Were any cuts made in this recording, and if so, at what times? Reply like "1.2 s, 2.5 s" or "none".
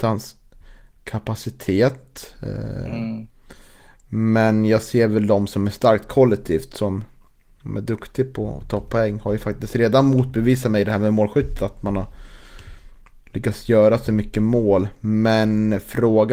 none